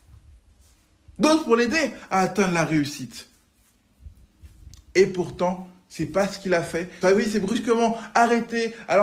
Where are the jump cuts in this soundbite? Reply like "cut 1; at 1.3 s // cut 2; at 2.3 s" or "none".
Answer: cut 1; at 7.0 s